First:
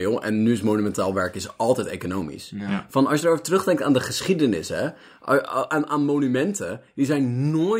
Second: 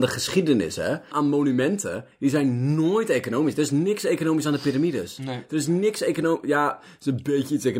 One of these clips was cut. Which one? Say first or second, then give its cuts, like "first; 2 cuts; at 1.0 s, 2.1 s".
second; 1 cut; at 1.1 s